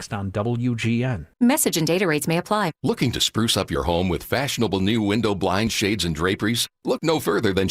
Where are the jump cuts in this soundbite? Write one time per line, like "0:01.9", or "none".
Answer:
0:01.3